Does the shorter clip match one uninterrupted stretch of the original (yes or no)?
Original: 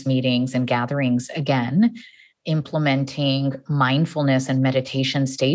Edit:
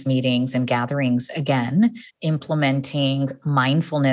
no